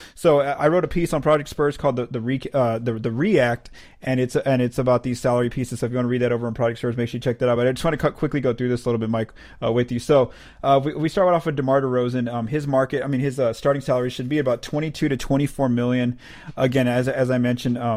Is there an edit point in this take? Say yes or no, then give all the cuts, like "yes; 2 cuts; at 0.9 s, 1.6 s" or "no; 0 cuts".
no; 0 cuts